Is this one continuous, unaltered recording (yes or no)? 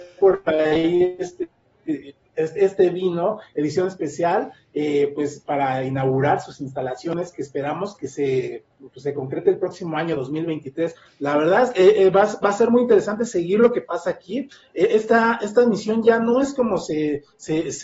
no